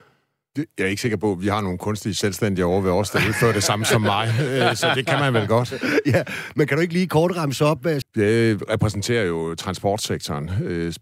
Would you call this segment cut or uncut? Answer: cut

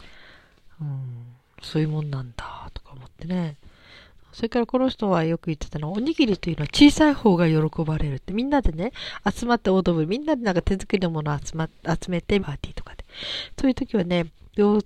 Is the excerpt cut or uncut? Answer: cut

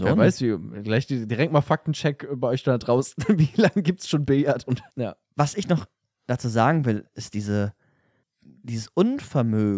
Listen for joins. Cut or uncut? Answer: cut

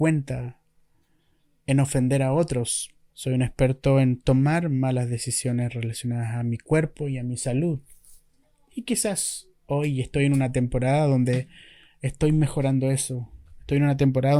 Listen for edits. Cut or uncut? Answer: cut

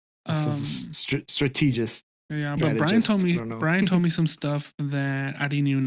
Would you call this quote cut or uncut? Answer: cut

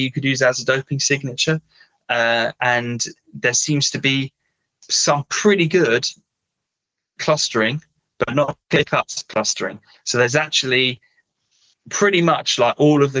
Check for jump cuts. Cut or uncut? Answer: uncut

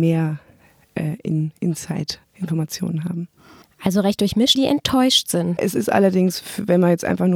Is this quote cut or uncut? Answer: cut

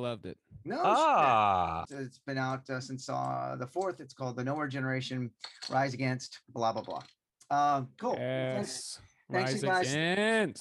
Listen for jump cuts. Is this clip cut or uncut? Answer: cut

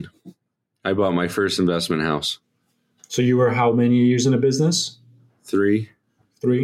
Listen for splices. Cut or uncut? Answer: uncut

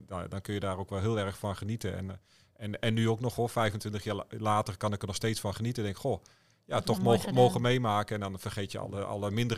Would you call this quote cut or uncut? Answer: uncut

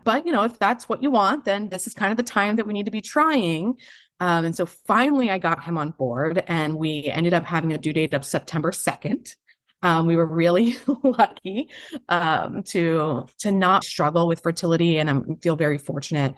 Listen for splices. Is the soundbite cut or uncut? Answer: cut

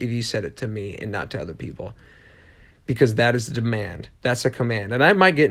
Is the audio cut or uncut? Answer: uncut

